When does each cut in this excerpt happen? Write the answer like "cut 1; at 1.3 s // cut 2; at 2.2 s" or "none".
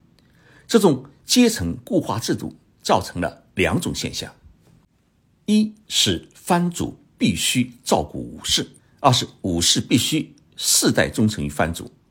cut 1; at 8.8 s